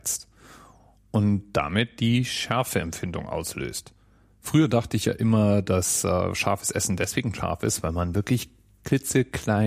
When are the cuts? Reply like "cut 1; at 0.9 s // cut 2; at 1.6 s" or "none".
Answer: none